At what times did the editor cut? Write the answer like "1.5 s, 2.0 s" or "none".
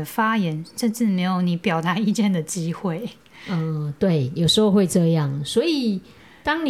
none